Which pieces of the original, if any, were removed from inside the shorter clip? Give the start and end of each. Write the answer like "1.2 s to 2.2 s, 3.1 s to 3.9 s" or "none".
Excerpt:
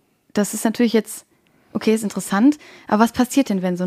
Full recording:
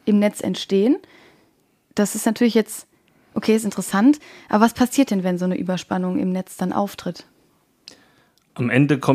none